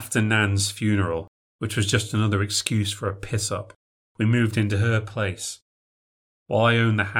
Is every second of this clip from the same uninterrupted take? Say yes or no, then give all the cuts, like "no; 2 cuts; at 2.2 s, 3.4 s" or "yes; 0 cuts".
yes; 0 cuts